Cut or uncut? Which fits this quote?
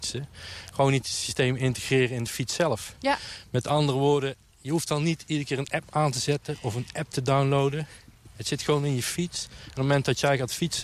uncut